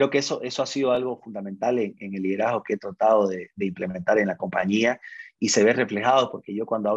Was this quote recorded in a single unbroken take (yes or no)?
yes